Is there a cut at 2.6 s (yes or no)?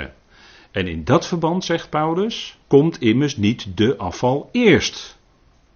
yes